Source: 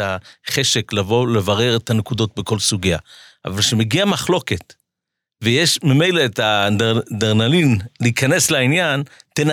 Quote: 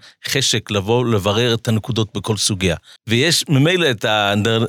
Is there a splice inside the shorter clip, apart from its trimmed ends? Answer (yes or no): yes